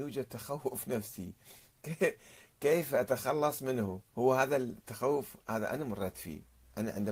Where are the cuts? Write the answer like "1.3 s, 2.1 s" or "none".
4.1 s